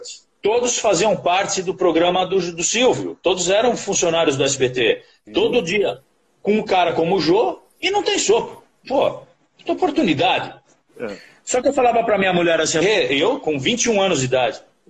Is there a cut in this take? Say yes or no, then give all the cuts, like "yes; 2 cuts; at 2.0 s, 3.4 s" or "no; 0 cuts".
yes; 2 cuts; at 5.3 s, 12.8 s